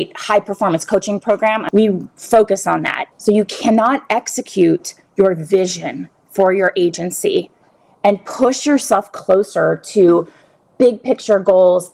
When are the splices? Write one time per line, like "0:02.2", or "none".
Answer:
0:03.1